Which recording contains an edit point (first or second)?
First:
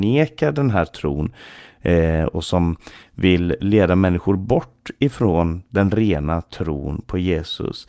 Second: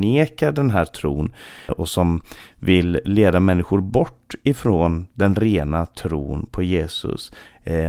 second